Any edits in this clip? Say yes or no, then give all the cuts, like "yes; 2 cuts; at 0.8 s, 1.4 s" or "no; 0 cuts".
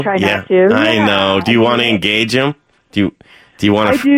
no; 0 cuts